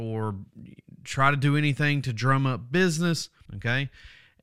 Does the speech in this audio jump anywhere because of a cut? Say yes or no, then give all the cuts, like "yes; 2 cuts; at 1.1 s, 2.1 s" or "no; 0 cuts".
yes; 1 cut; at 3.5 s